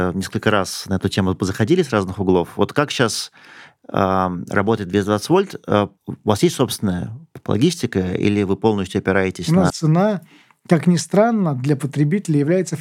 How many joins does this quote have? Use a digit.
1